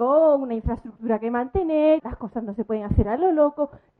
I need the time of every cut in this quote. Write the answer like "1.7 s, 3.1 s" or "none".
2.0 s